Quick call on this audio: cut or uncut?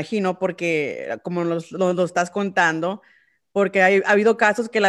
uncut